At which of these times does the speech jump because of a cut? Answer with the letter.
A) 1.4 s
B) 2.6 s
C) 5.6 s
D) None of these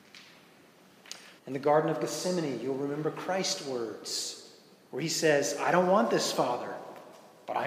A